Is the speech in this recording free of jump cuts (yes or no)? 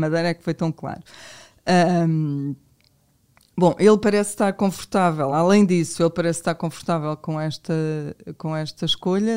yes